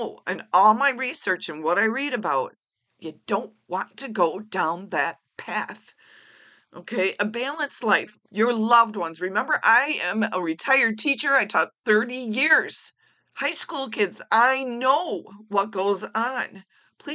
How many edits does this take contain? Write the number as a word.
one